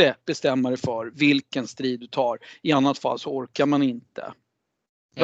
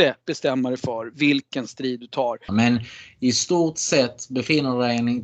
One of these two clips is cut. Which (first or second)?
second